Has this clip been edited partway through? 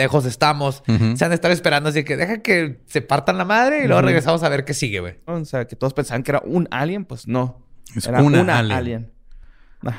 yes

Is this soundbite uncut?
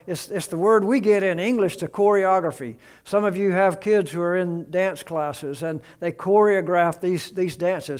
yes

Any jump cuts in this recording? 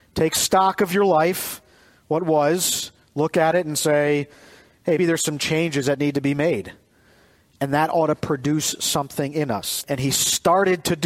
yes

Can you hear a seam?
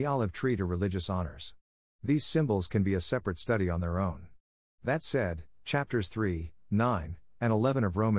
no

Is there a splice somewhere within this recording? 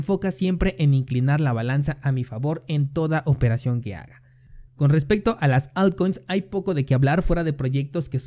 yes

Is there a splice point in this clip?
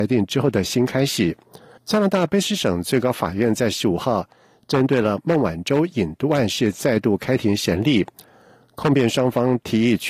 yes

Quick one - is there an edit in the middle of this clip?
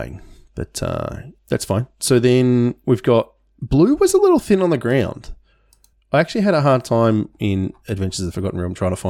yes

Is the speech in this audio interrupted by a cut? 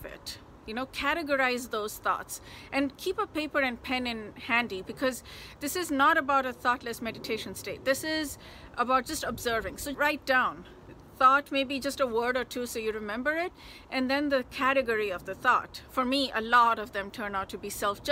yes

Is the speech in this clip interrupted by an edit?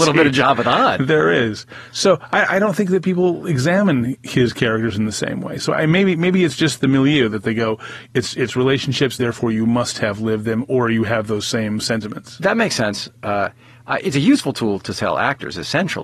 yes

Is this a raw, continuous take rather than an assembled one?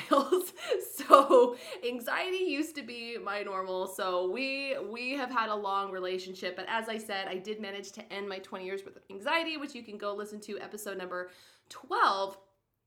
yes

